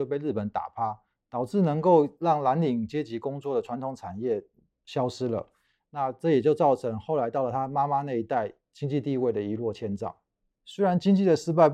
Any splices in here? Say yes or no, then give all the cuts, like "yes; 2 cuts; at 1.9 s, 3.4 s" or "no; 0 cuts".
no; 0 cuts